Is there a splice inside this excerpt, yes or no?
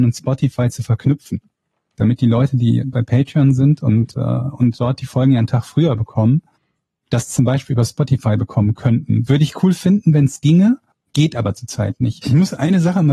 yes